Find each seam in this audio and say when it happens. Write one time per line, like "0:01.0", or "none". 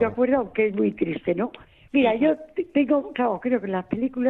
0:01.9